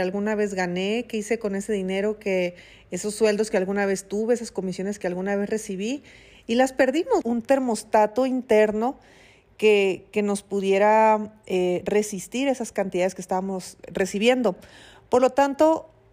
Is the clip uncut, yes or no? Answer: no